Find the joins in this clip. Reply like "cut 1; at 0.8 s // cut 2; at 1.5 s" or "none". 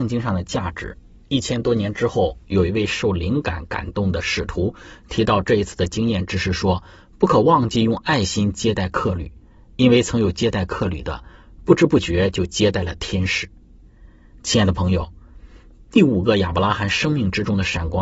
none